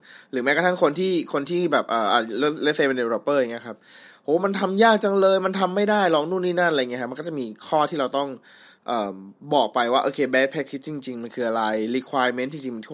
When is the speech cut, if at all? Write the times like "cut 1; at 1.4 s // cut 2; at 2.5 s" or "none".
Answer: none